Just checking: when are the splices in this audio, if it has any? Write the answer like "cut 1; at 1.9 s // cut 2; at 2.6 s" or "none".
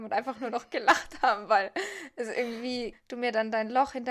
cut 1; at 2.9 s